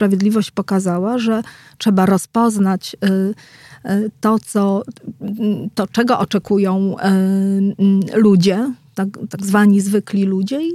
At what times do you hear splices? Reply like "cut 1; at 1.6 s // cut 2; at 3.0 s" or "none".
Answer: none